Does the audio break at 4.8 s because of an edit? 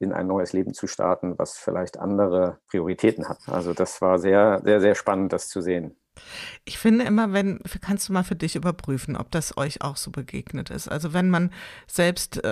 no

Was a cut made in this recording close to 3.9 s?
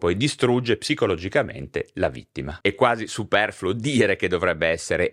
no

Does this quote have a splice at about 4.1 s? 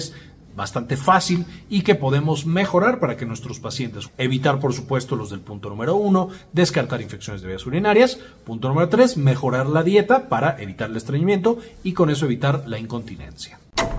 yes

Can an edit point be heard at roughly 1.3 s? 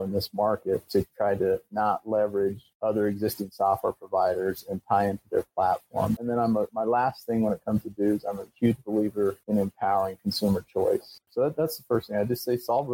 no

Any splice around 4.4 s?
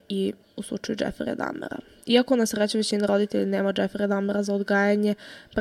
no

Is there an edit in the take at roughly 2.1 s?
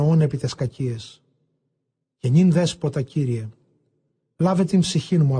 no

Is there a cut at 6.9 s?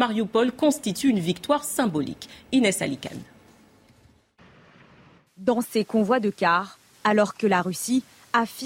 yes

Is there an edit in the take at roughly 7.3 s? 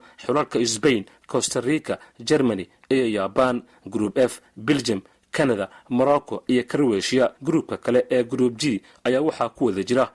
yes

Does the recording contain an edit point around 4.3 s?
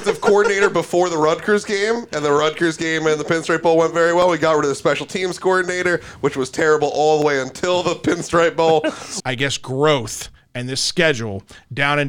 no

